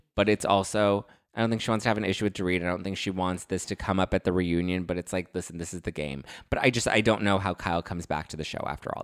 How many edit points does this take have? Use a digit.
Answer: 1